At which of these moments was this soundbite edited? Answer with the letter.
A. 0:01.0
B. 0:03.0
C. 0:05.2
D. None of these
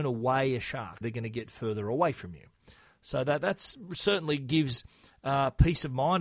A